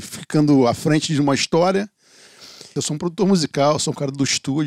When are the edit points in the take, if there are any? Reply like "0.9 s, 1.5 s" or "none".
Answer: 2.8 s